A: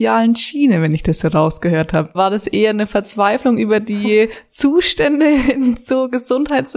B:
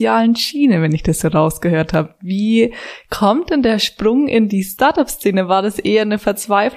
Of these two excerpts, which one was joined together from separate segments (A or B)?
A